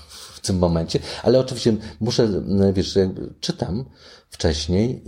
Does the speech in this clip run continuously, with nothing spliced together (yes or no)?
yes